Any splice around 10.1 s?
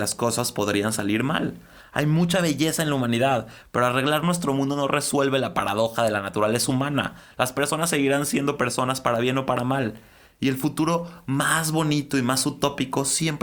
no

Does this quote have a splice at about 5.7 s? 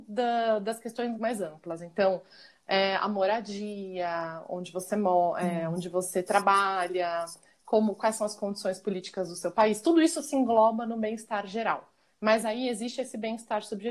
no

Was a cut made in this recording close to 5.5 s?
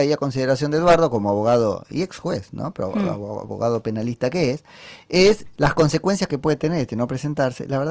yes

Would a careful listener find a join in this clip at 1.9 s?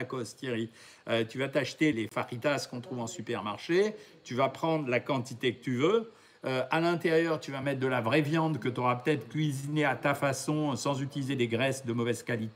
yes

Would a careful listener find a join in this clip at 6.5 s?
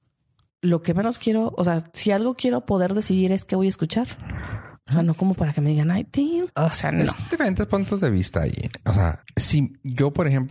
yes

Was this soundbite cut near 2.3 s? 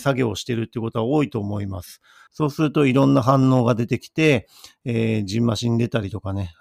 yes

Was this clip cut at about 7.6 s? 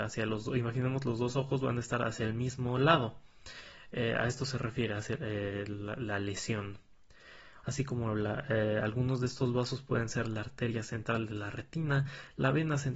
yes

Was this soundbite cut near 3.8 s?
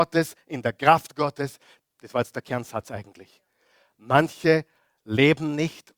no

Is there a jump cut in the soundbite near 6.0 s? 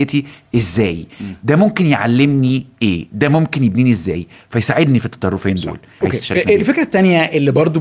yes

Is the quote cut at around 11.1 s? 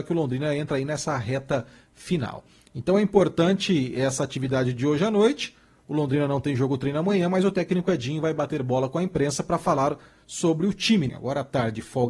yes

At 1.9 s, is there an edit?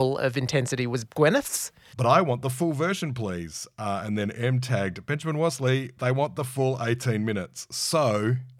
yes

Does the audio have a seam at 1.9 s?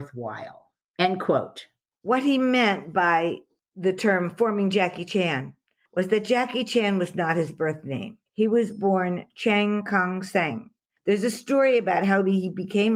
yes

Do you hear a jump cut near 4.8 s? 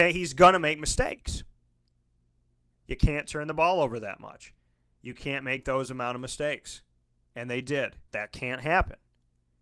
no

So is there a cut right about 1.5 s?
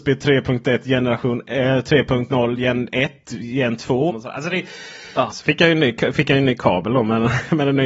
no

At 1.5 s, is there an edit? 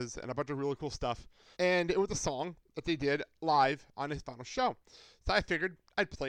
yes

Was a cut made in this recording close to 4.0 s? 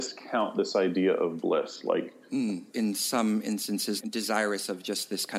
yes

